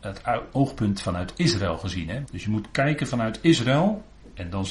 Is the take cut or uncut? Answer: cut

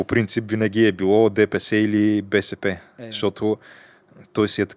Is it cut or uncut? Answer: uncut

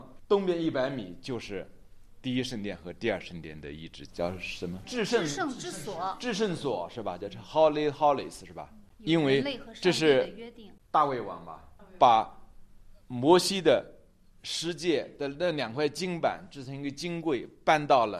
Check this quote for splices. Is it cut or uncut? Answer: cut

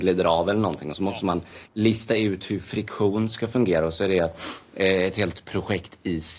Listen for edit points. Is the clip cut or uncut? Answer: uncut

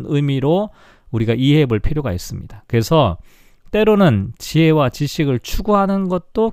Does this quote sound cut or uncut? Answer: uncut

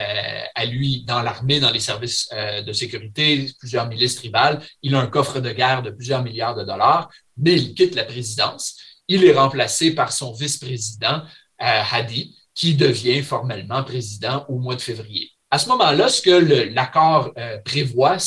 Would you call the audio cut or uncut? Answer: uncut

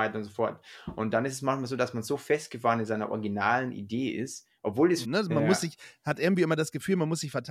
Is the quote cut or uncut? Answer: cut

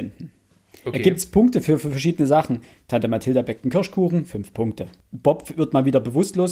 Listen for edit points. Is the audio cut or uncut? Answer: uncut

